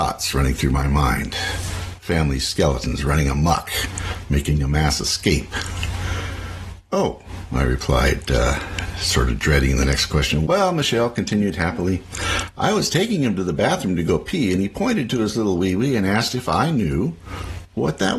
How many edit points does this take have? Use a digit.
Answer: 1